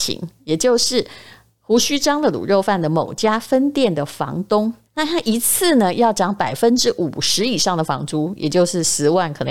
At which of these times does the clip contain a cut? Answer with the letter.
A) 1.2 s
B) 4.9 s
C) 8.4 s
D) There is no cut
B